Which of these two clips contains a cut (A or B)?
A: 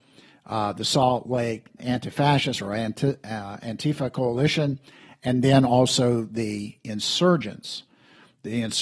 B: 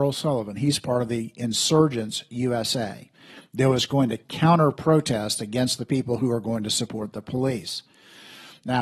A